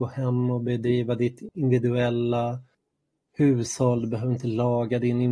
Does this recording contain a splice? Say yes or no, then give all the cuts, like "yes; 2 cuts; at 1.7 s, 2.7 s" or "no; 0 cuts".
no; 0 cuts